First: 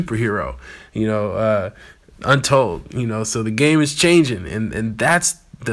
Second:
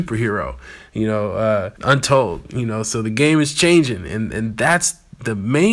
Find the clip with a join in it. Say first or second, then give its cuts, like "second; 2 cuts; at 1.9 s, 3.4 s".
second; 1 cut; at 1.8 s